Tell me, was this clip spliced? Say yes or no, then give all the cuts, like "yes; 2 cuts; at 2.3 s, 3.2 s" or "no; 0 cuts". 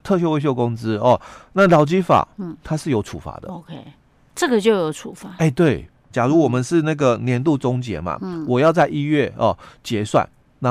yes; 1 cut; at 6.1 s